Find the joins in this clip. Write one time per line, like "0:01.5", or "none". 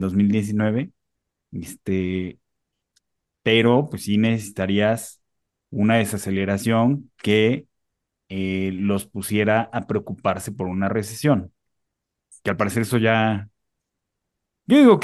none